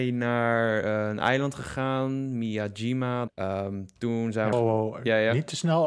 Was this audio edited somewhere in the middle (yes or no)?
yes